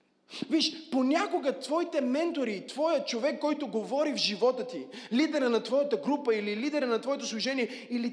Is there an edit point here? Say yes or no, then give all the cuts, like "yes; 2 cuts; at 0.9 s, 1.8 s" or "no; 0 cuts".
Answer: no; 0 cuts